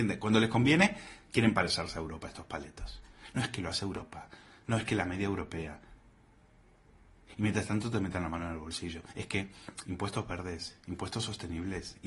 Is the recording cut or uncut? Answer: uncut